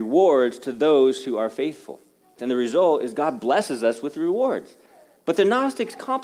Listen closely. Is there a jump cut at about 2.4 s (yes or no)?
yes